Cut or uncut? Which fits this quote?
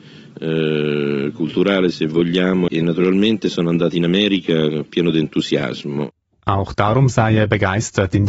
cut